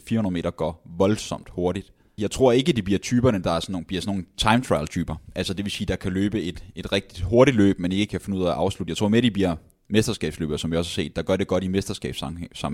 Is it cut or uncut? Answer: cut